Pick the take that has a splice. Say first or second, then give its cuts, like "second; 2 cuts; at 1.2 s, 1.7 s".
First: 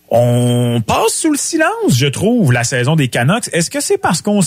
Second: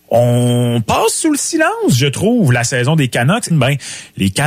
second; 1 cut; at 3.5 s